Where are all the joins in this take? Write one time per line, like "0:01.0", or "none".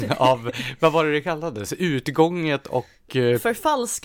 none